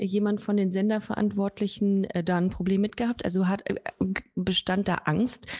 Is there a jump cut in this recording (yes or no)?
no